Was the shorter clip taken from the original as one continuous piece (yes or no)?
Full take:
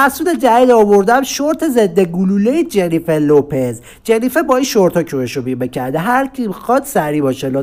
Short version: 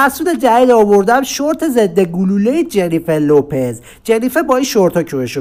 yes